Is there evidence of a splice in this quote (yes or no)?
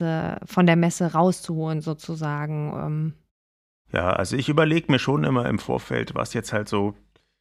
no